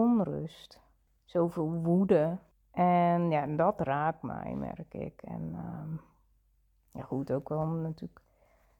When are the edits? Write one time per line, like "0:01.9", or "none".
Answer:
none